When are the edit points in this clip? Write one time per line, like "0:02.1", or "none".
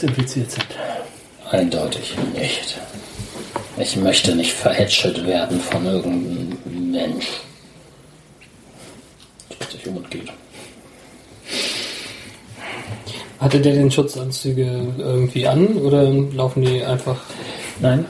none